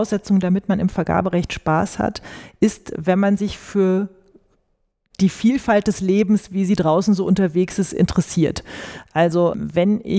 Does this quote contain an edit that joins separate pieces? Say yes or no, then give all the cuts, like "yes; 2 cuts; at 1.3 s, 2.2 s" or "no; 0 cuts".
no; 0 cuts